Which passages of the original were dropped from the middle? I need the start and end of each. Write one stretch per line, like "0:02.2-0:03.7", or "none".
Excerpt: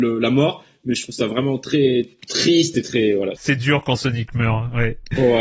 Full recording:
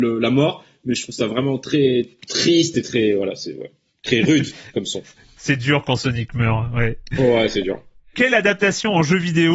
0:03.4-0:05.4